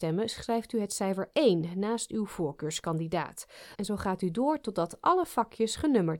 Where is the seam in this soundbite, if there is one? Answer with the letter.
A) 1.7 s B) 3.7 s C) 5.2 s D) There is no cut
B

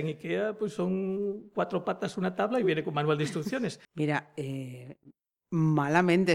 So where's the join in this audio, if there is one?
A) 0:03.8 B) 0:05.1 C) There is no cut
A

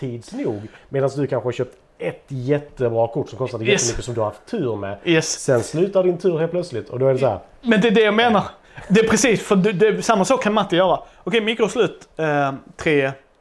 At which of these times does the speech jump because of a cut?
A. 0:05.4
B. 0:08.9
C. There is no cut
C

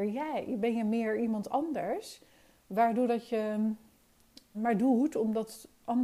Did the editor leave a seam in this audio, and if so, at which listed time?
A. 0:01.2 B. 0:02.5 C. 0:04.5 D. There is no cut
C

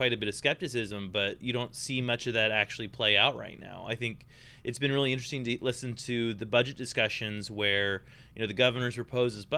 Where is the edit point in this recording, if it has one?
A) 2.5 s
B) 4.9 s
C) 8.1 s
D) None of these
D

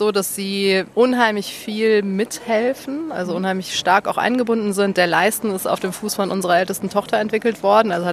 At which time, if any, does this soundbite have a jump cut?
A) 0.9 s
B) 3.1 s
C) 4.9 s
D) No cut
A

